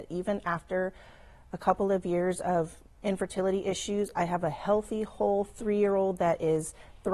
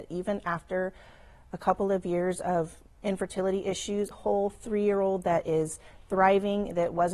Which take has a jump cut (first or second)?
second